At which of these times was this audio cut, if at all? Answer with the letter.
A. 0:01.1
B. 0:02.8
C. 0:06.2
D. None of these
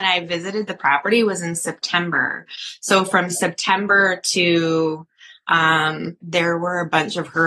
C